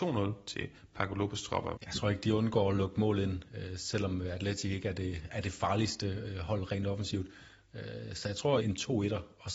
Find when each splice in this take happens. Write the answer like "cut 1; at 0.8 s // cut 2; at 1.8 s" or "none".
cut 1; at 1.8 s // cut 2; at 8.6 s

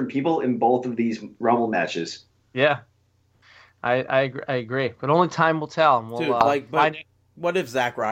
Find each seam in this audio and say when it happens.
none

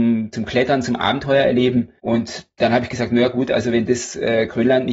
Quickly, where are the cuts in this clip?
cut 1; at 2.0 s

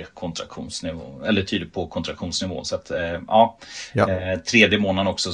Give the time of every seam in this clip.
none

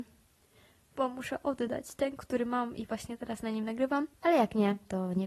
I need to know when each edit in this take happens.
cut 1; at 4.1 s

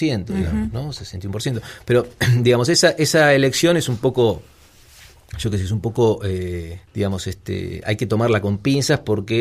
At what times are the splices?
cut 1; at 6.9 s

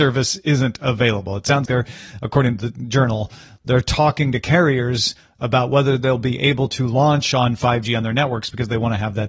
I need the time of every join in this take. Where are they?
cut 1; at 1.7 s

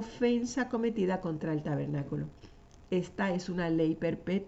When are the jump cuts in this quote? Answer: none

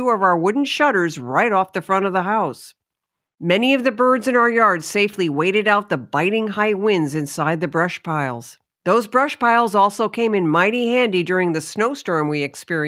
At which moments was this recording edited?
cut 1; at 8.7 s

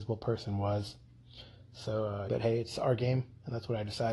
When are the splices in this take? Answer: cut 1; at 2.3 s

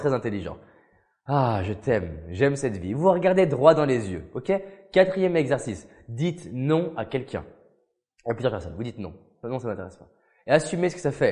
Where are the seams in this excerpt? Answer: none

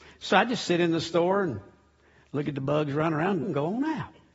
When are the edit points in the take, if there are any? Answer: cut 1; at 3.4 s

